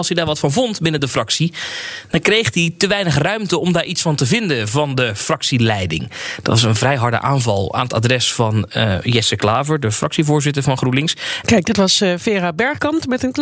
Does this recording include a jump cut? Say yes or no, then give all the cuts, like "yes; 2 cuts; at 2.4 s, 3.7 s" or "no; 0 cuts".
yes; 1 cut; at 11.4 s